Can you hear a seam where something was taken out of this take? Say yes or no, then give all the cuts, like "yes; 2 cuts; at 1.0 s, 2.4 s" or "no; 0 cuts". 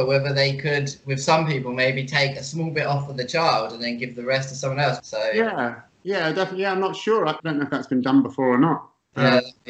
yes; 2 cuts; at 5.0 s, 7.4 s